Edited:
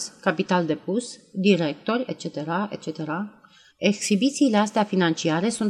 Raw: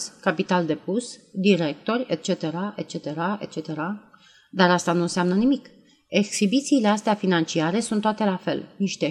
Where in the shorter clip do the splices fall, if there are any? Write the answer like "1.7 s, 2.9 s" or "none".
2.1 s, 3.7 s